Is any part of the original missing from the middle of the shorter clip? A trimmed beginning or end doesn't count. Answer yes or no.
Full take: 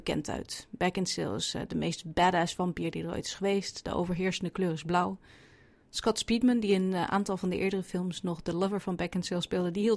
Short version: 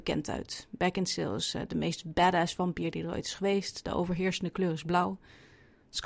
no